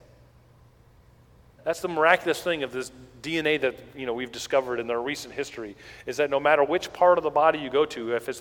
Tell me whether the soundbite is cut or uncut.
cut